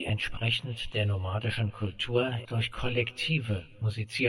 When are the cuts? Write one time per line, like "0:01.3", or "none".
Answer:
0:02.4

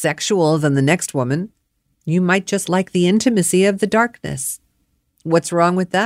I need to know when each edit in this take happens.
none

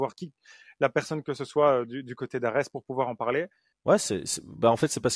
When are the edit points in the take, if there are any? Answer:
0:03.7

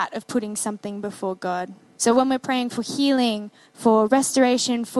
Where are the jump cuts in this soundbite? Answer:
0:02.0

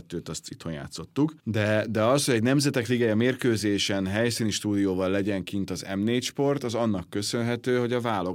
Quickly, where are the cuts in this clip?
0:01.4

